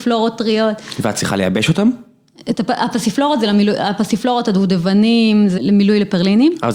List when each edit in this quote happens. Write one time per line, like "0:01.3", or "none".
0:05.6